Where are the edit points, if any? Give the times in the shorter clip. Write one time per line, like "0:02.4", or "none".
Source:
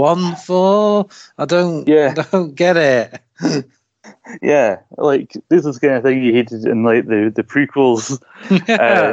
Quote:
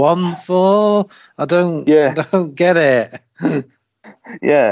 none